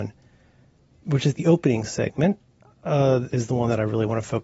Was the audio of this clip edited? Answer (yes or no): yes